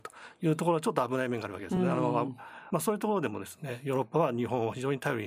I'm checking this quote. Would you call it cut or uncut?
uncut